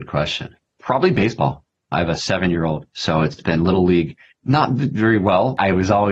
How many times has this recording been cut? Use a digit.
2